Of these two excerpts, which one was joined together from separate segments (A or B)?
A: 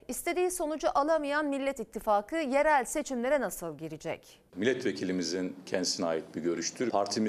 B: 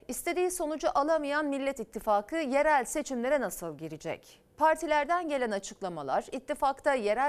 A